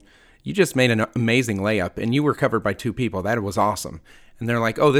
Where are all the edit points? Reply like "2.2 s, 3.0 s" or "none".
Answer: none